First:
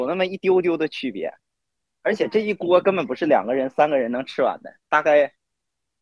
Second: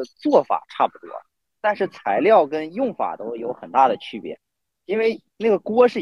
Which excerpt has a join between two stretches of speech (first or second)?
first